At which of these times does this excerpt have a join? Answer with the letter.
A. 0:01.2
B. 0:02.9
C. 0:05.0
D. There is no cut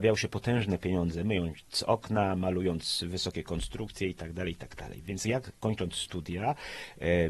D